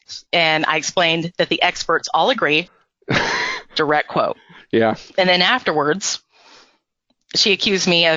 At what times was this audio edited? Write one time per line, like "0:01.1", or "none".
0:02.7
0:05.1